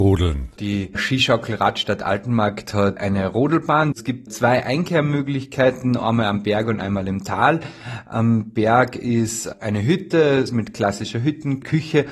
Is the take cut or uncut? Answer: cut